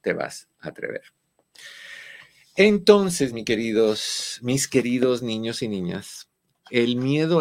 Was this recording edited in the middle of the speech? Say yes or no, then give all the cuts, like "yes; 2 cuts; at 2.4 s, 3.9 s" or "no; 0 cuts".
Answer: no; 0 cuts